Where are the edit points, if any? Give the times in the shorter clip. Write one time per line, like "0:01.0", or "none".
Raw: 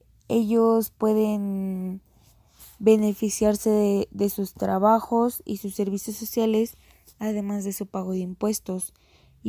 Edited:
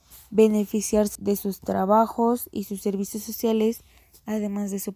0:01.2